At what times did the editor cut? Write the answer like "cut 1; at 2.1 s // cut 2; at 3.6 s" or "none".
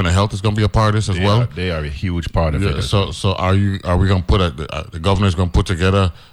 cut 1; at 3.8 s